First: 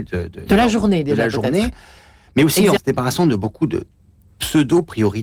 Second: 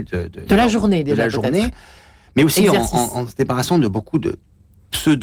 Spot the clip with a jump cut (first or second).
first